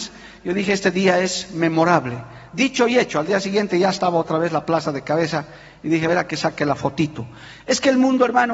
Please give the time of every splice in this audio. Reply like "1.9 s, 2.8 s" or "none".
6.1 s